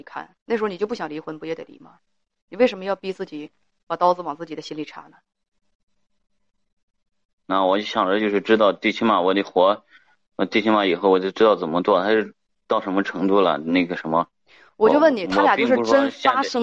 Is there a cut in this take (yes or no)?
no